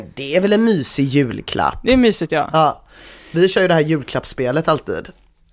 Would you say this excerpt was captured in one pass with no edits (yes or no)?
yes